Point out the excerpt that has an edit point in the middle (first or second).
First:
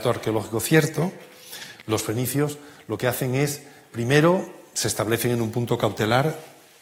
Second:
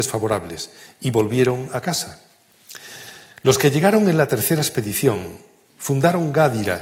first